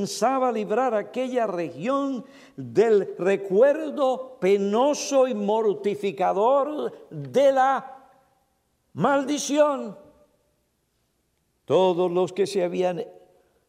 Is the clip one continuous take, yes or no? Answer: yes